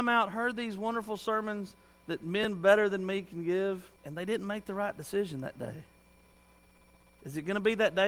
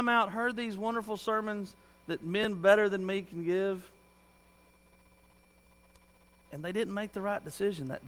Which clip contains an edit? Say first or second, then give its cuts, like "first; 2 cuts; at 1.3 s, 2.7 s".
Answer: first; 1 cut; at 4.0 s